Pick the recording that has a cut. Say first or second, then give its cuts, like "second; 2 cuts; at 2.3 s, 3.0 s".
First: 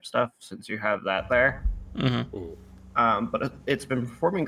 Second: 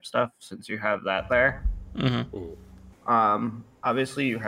second; 1 cut; at 2.9 s